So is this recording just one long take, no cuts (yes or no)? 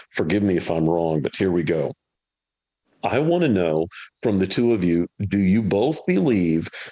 yes